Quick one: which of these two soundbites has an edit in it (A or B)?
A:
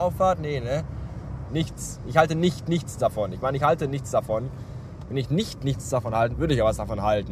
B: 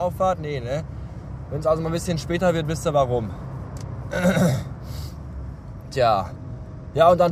A